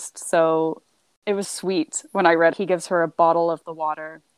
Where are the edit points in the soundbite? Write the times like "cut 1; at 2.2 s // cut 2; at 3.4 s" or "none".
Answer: cut 1; at 1.4 s // cut 2; at 2.5 s